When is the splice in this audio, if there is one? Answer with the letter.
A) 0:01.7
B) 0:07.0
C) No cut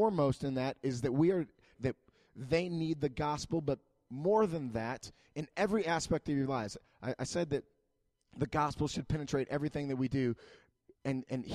A